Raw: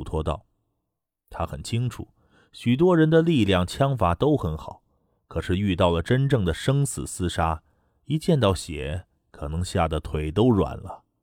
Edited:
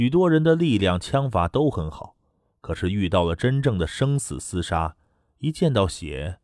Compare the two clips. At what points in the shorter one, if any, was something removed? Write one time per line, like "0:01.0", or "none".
none